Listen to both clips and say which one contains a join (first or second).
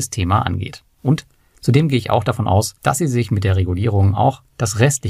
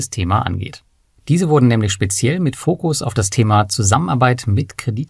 first